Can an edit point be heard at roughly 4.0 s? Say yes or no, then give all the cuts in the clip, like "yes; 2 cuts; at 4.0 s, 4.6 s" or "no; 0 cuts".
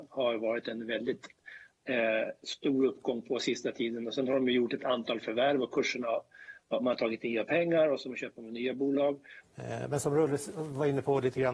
no; 1 cut; at 9.4 s